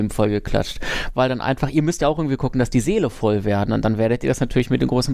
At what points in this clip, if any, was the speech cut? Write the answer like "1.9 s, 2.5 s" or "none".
none